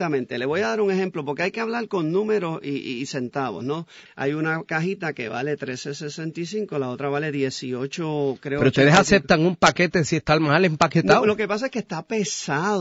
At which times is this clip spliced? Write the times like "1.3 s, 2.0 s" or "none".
4.1 s